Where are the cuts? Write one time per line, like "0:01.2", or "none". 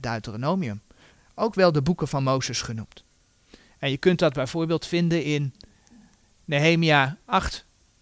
none